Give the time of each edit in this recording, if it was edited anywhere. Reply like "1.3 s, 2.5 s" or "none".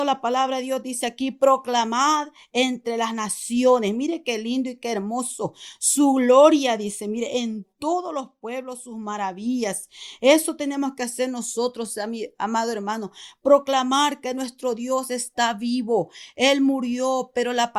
none

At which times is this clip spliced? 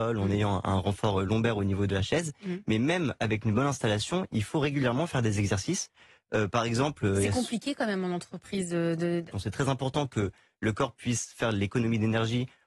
9.3 s

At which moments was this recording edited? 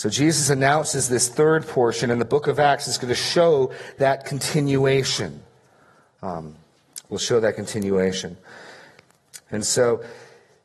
none

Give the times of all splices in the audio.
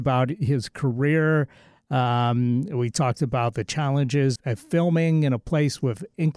4.4 s

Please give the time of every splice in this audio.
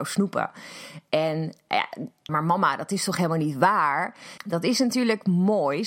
2.3 s, 4.4 s

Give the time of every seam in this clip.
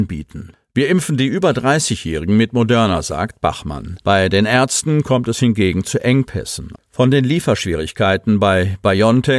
4.0 s, 6.8 s

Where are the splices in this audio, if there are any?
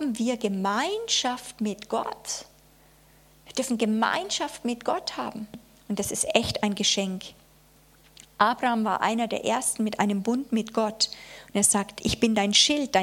none

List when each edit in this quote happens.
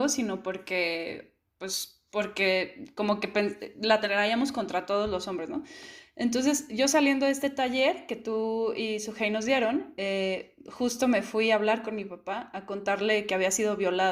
none

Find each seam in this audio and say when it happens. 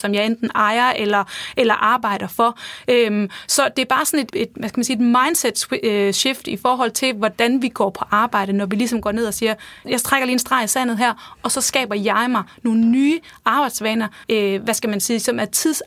4.3 s, 9.8 s, 14.2 s

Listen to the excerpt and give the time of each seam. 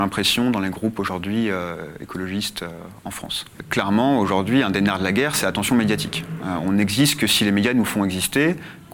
none

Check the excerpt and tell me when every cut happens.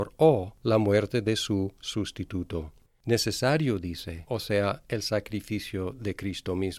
2.9 s, 4.3 s

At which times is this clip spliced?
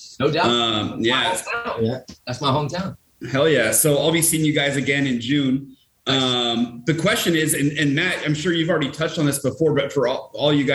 none

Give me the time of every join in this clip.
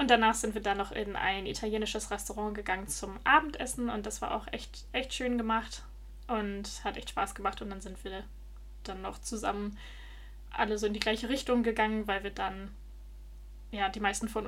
none

